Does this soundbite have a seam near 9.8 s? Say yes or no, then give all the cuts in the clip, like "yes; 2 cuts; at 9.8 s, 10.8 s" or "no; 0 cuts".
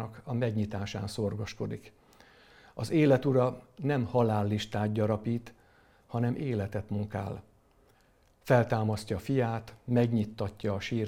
no; 0 cuts